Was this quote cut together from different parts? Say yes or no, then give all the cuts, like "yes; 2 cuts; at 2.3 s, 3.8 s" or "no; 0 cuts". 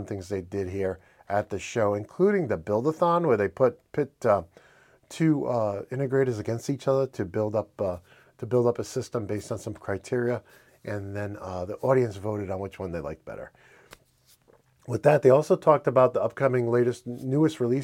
no; 0 cuts